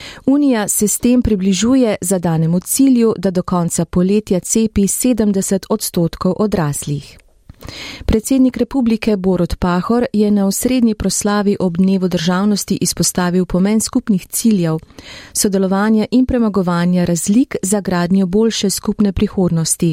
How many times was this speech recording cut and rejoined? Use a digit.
1